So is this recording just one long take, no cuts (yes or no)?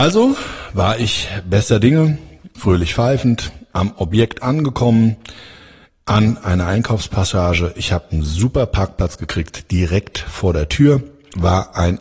yes